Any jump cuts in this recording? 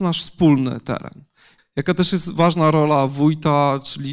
yes; 1 cut; at 1.6 s

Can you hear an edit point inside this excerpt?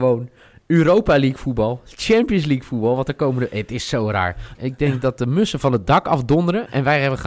yes; 1 cut; at 4.5 s

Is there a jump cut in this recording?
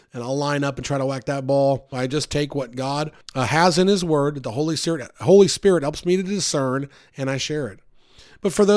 yes; 2 cuts; at 1.9 s, 3.2 s

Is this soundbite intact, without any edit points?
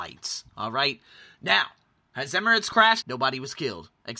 no; 1 cut; at 3.0 s

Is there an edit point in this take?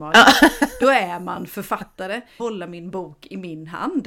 yes; 1 cut; at 2.4 s

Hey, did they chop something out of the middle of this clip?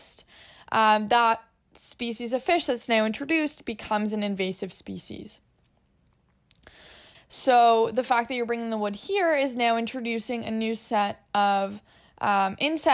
yes; 1 cut; at 7.1 s

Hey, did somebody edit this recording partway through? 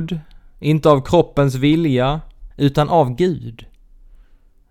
yes; 1 cut; at 2.5 s

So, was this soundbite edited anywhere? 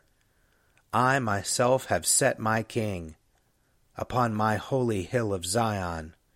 no; 0 cuts

